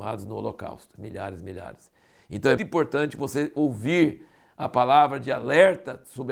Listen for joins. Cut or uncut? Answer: cut